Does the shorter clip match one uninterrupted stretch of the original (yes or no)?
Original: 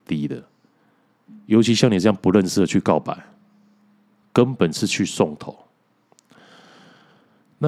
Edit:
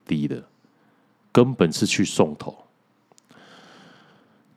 no